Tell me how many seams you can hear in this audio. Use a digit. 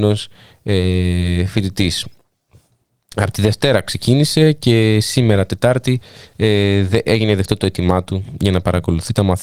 0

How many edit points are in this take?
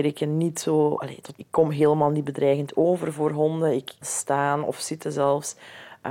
2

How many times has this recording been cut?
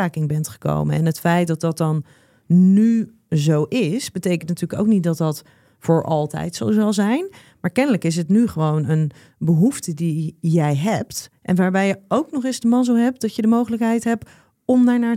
1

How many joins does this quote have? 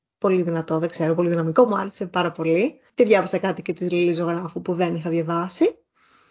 1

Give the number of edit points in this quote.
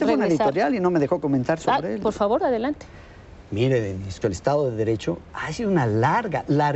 1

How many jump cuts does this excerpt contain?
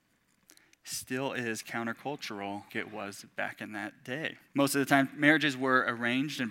2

